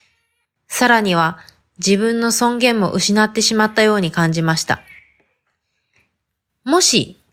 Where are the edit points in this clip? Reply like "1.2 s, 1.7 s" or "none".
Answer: 1.6 s